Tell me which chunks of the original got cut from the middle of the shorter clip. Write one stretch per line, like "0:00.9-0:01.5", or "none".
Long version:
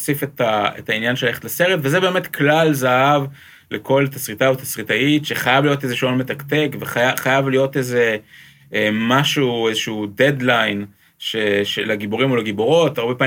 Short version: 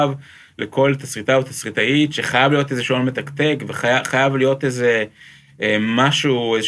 none